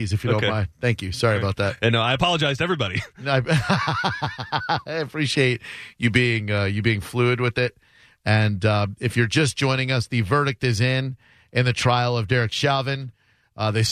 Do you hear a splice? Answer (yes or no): no